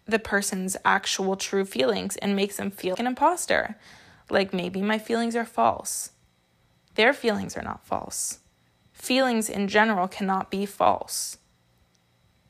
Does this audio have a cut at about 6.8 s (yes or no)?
no